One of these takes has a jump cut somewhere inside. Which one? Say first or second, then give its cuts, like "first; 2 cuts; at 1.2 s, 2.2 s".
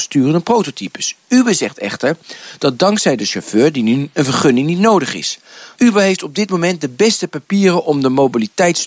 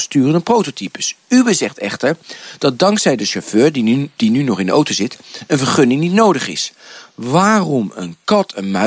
first; 2 cuts; at 4.1 s, 5.7 s